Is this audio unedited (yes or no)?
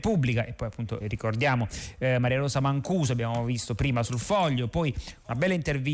no